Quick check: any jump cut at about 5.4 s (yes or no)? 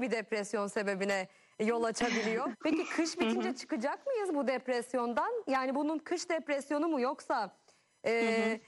no